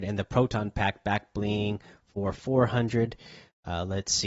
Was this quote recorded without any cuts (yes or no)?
yes